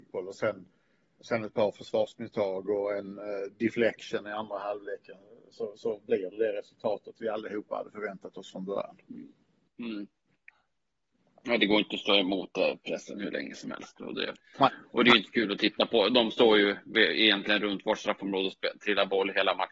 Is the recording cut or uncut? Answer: uncut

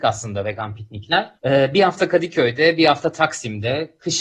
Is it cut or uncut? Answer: cut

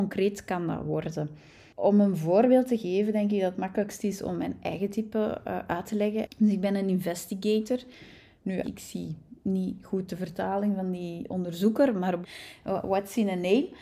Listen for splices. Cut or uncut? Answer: cut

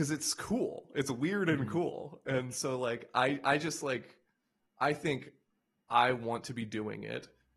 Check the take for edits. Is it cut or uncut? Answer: uncut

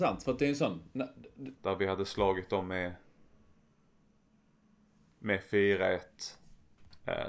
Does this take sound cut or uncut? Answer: cut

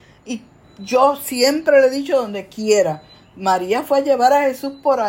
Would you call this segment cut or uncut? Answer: uncut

